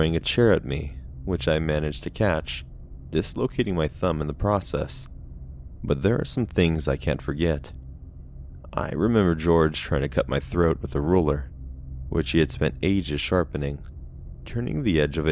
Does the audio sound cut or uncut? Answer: cut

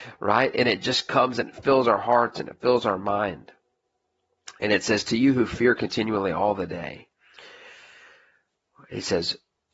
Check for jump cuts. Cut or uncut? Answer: uncut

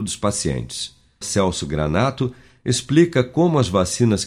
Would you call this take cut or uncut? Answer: cut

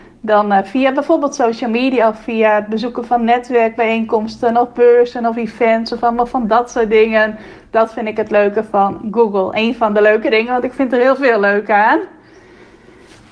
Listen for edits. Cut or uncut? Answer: uncut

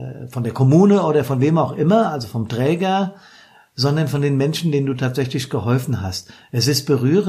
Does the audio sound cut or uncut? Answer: uncut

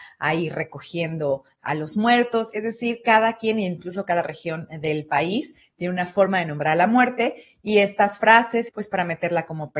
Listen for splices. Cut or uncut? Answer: cut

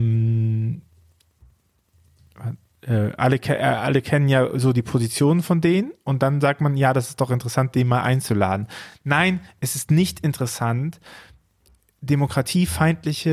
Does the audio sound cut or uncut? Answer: uncut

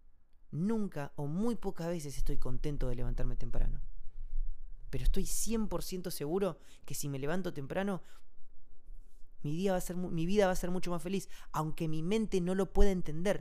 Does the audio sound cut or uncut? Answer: uncut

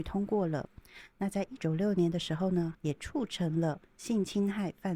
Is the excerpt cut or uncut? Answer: cut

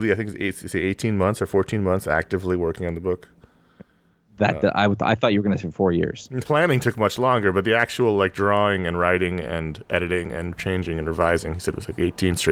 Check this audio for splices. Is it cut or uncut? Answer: cut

